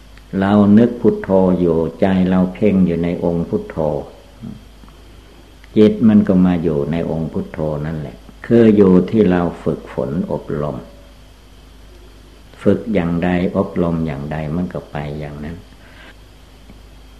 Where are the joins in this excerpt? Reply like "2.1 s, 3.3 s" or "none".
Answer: 8.4 s